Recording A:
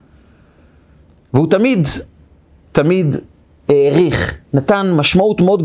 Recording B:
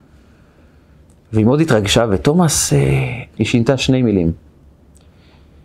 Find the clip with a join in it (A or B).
B